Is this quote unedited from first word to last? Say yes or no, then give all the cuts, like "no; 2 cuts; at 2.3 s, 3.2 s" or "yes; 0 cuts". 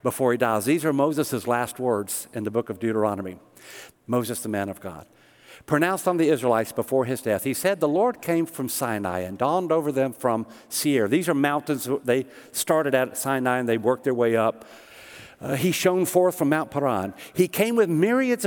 no; 1 cut; at 3.9 s